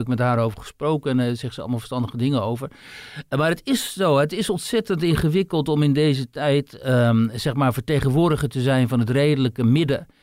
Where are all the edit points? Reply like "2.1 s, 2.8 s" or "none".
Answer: none